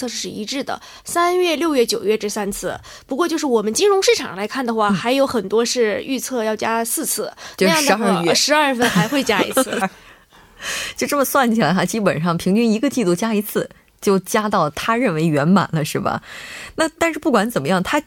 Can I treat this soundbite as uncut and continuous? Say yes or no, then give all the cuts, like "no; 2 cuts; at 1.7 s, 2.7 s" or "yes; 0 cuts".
no; 1 cut; at 9.8 s